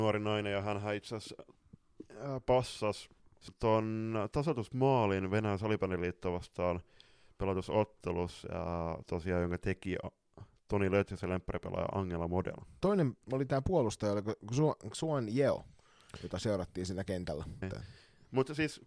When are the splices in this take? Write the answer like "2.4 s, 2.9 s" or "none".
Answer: 12.8 s, 17.6 s